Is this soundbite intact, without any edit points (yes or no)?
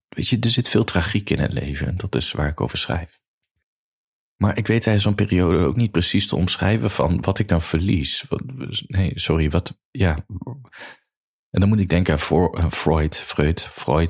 yes